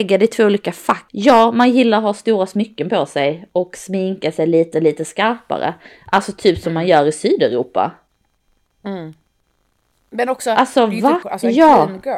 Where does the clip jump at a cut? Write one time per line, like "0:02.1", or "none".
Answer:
0:01.1
0:11.2